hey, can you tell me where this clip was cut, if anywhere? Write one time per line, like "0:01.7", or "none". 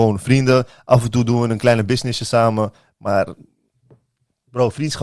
none